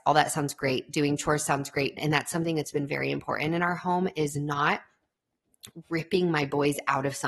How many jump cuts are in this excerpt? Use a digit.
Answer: 1